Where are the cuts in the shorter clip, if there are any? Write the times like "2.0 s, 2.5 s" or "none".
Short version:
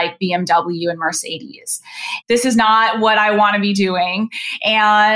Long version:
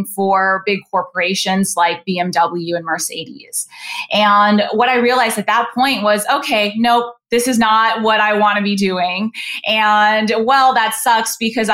2.2 s